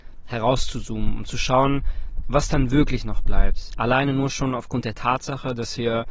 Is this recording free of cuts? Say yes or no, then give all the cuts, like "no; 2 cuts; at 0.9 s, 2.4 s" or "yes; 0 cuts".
yes; 0 cuts